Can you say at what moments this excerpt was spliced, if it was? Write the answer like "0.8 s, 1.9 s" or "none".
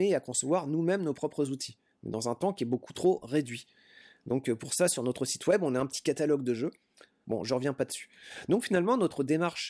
7.2 s